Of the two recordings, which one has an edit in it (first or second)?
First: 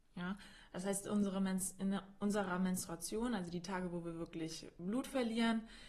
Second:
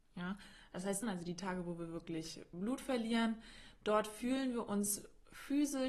second